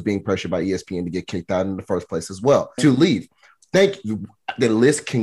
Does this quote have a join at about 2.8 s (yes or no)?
yes